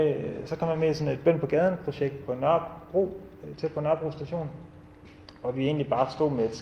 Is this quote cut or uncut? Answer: cut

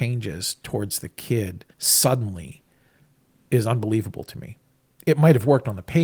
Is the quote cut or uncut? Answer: cut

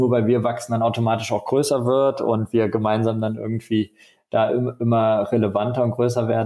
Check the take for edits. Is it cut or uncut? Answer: uncut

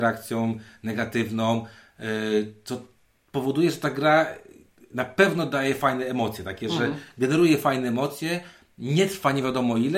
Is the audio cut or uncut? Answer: uncut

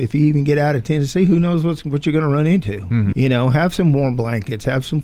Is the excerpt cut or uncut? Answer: cut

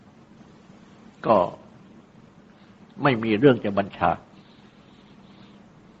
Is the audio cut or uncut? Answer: cut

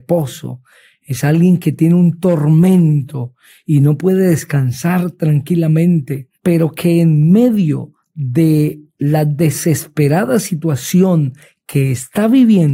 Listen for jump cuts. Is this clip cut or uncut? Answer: cut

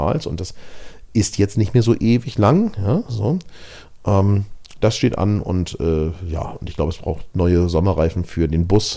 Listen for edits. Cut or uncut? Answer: uncut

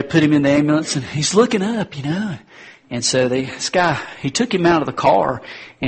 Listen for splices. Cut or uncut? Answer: cut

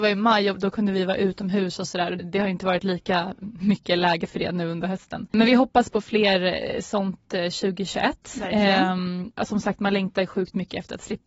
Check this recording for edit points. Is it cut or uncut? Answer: cut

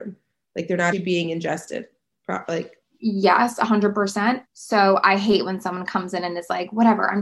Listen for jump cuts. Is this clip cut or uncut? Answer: cut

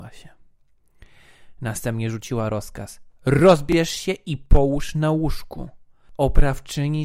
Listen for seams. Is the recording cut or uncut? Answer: uncut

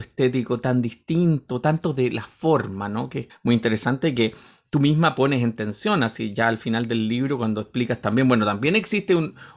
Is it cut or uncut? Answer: cut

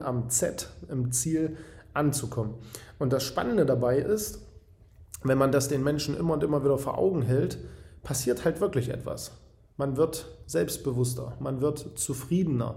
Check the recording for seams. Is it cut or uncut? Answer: uncut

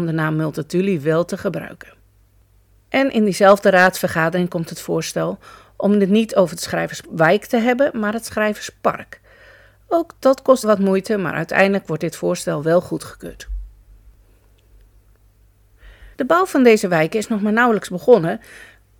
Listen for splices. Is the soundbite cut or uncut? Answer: cut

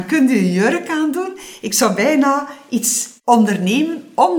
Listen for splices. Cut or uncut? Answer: cut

